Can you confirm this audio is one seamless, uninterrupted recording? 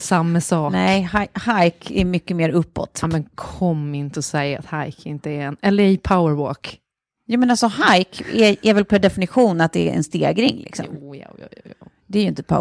yes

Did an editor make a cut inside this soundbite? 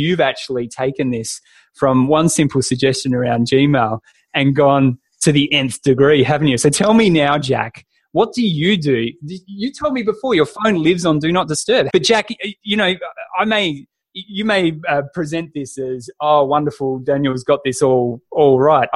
yes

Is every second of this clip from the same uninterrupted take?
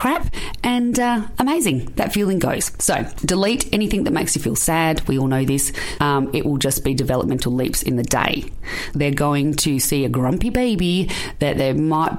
no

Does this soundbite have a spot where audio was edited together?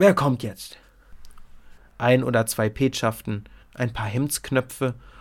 yes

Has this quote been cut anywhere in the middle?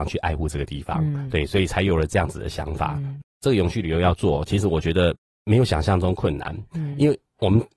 no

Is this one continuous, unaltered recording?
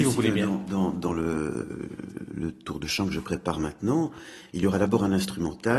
yes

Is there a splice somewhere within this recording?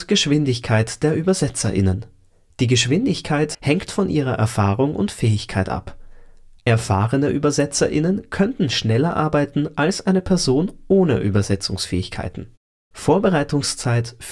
yes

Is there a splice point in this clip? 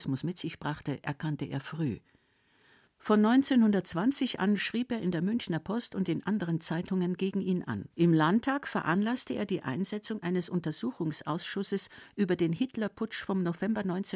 yes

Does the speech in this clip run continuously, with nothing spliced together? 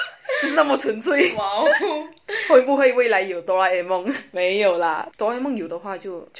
yes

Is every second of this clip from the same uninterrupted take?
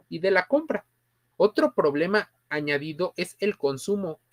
no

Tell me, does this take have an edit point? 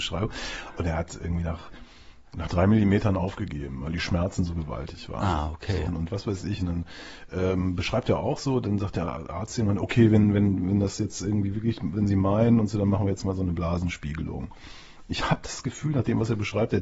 yes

